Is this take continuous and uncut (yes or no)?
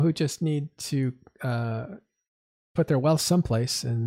yes